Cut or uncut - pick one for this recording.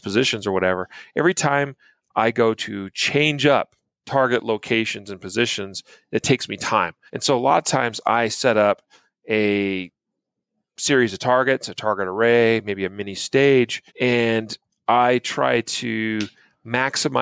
cut